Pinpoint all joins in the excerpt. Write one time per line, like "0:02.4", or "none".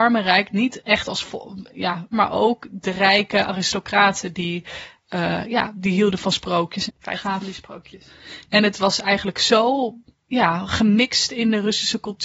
0:02.1
0:06.9
0:08.5